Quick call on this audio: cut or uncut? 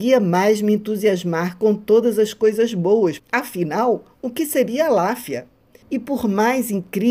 cut